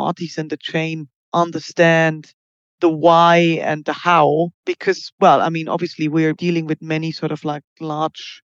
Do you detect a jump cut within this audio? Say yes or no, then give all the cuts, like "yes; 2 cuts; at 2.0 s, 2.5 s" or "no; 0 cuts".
no; 0 cuts